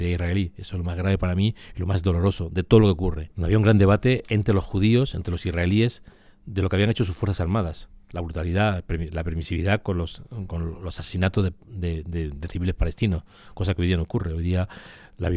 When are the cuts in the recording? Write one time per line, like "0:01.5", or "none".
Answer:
0:03.3
0:10.5